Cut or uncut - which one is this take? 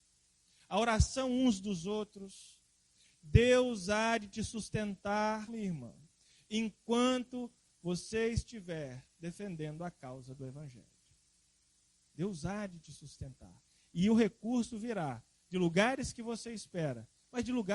cut